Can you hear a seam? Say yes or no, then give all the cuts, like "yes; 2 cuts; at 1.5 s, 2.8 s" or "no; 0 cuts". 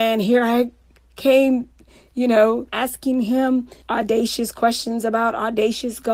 yes; 2 cuts; at 2.7 s, 3.8 s